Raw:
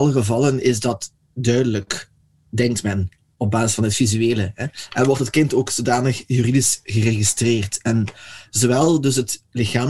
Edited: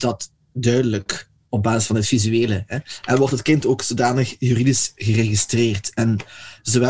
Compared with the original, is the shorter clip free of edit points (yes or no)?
no